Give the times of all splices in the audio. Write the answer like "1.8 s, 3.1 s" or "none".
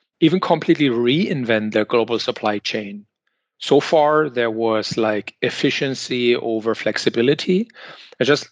none